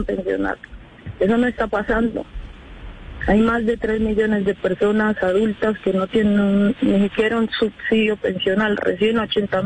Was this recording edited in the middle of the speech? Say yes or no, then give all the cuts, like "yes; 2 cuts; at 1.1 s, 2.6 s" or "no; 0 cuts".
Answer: no; 0 cuts